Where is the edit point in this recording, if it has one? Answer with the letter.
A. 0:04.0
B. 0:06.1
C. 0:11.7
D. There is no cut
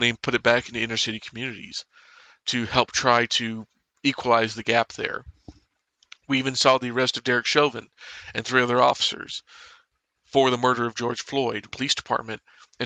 C